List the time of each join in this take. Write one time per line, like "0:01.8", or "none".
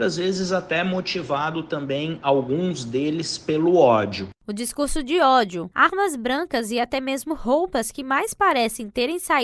0:05.7